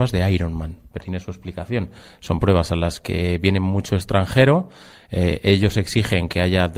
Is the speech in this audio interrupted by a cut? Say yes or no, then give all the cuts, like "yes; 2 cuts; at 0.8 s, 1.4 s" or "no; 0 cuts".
yes; 1 cut; at 1.0 s